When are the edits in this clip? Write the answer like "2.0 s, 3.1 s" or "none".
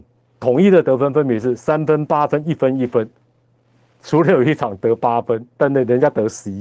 none